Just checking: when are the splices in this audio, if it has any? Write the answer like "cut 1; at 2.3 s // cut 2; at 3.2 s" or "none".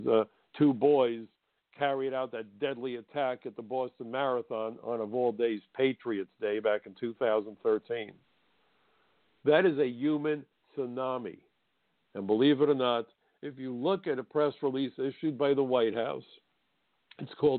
cut 1; at 9.4 s // cut 2; at 12.1 s